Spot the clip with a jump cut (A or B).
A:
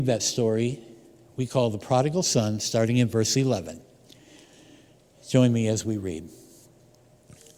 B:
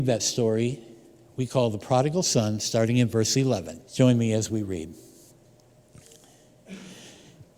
B